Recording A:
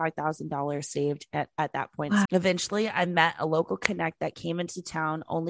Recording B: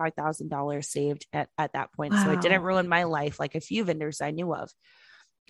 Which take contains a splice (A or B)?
A